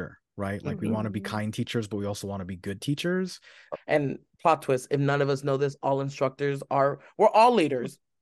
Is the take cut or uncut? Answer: cut